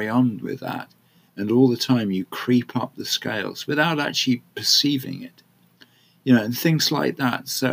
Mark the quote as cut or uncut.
cut